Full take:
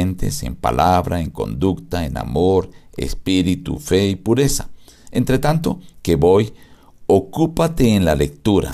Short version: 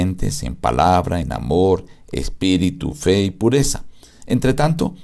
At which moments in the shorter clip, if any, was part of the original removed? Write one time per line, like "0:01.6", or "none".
0:01.2